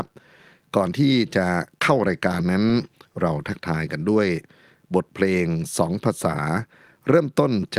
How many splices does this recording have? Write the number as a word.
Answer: zero